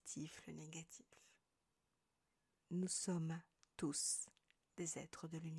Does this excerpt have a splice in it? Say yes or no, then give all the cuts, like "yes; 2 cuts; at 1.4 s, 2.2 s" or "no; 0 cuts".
yes; 1 cut; at 2.6 s